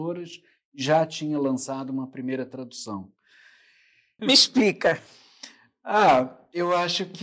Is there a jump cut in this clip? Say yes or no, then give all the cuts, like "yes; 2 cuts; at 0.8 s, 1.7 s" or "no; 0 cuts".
yes; 1 cut; at 4.2 s